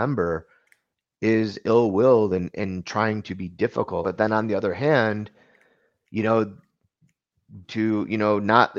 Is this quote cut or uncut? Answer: cut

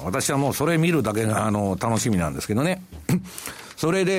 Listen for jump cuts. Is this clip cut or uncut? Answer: uncut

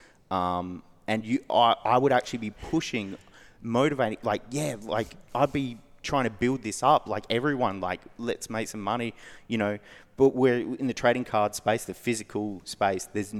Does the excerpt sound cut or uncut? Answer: uncut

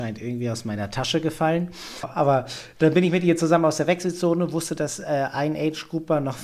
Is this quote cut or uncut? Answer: cut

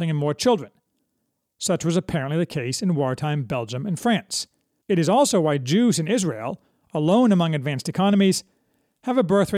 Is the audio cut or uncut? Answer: uncut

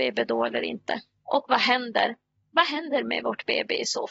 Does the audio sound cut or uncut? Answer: cut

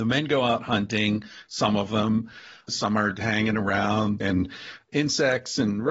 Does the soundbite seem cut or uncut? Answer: cut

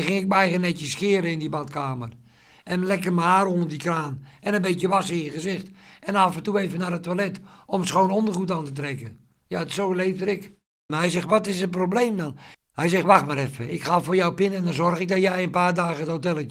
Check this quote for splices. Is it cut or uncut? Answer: cut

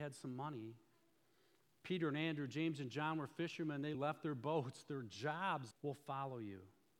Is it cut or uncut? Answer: cut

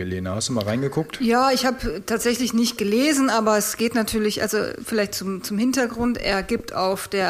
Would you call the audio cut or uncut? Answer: uncut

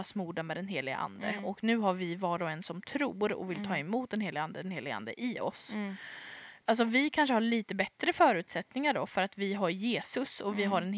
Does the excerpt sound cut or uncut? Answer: cut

